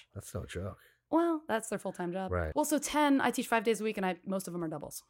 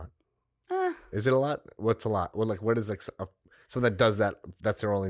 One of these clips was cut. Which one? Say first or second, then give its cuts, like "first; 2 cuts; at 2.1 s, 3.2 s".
first; 1 cut; at 2.5 s